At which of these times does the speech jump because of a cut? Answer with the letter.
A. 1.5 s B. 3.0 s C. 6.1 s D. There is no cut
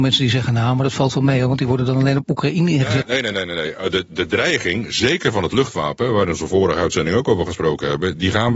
B